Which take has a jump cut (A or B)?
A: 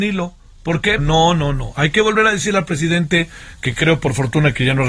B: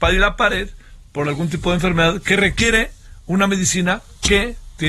A